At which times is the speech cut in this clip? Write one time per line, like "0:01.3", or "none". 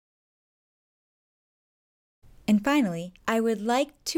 0:03.2